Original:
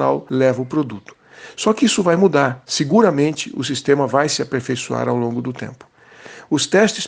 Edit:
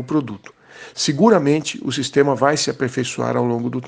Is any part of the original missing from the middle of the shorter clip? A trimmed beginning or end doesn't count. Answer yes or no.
yes